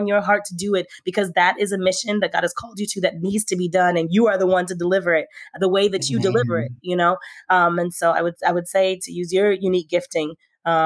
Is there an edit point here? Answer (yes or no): no